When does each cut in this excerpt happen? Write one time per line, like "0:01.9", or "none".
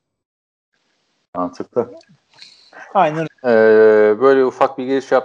0:03.2